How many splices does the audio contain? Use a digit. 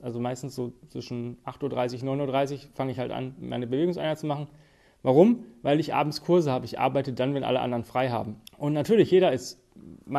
1